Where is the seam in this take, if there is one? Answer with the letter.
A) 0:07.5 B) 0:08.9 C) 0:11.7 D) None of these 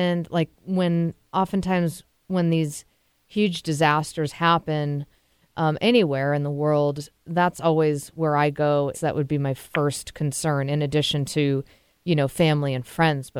B